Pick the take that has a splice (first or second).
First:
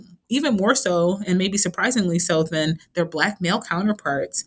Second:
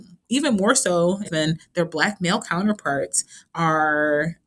second